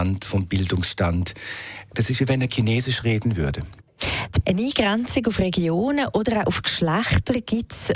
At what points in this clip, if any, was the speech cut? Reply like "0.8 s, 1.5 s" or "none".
1.9 s, 4.4 s